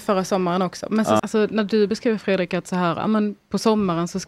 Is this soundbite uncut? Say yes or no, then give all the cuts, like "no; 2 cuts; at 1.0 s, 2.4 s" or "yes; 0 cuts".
no; 1 cut; at 1.2 s